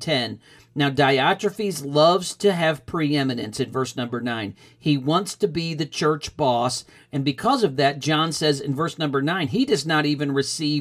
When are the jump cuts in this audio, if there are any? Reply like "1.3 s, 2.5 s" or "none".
none